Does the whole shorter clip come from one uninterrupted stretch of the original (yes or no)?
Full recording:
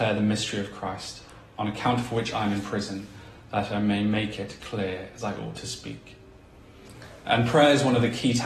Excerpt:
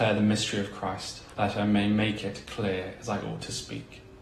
no